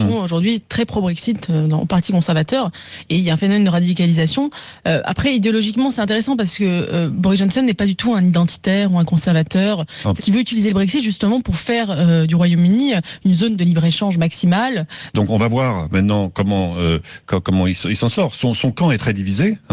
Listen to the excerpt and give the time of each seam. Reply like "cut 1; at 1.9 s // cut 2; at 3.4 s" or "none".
cut 1; at 10.2 s // cut 2; at 15.1 s